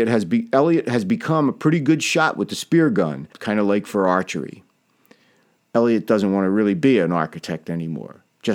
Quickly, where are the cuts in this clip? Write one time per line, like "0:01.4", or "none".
0:03.3
0:05.6